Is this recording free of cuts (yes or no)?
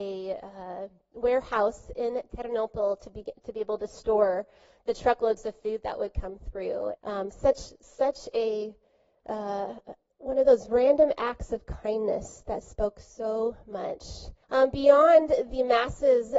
no